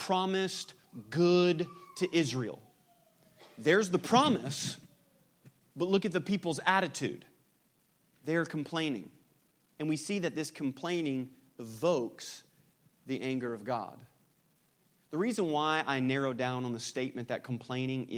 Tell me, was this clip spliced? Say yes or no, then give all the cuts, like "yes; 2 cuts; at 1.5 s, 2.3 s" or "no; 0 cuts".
no; 0 cuts